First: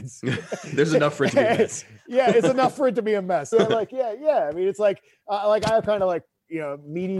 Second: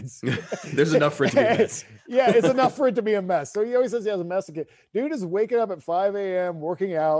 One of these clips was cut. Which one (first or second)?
first